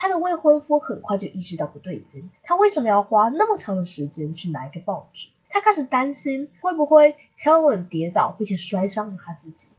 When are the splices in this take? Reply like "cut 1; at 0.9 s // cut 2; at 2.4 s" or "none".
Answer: cut 1; at 5.4 s